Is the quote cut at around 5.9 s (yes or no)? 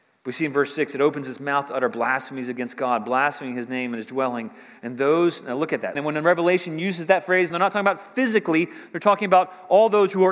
yes